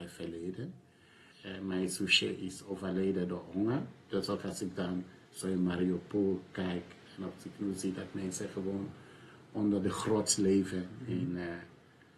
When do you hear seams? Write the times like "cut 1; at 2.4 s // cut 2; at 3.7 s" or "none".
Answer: cut 1; at 1.3 s